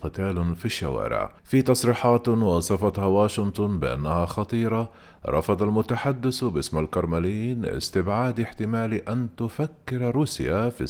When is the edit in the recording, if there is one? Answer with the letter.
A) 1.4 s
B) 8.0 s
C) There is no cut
A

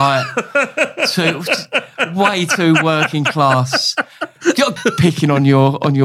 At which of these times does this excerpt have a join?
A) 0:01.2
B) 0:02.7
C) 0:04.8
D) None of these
C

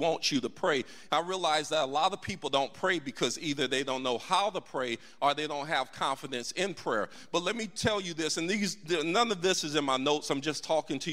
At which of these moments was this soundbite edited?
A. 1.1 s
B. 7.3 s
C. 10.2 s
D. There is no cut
A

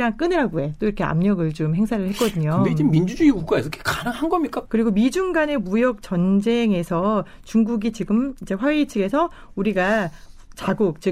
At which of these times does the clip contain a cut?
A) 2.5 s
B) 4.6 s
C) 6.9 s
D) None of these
B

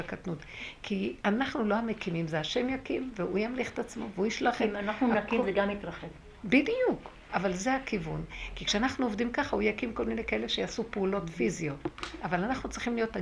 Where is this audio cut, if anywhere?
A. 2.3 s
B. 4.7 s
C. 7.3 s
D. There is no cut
C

